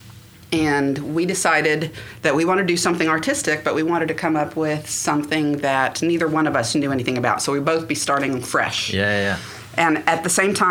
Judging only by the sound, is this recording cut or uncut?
uncut